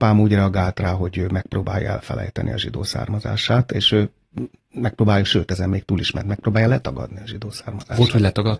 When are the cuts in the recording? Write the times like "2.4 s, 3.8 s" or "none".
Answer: none